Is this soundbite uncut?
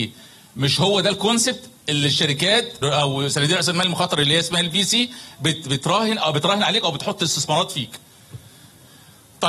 no; 1 cut; at 2.8 s

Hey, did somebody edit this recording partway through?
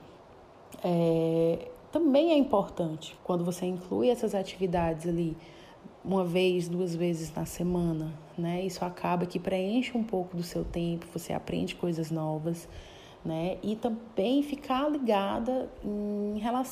yes; 1 cut; at 3.2 s

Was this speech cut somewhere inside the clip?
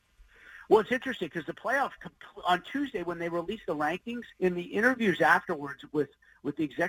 yes; 1 cut; at 4.3 s

